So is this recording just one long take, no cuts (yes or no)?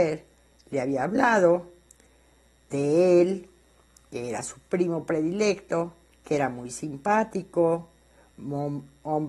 yes